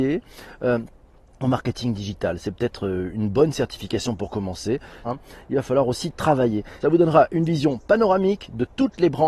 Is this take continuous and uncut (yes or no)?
no